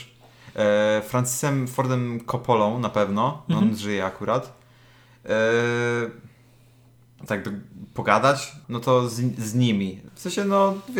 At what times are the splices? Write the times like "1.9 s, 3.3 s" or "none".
7.3 s, 8.6 s, 10.1 s